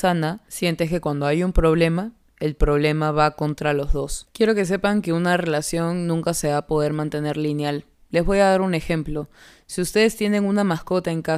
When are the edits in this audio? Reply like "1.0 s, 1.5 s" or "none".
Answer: none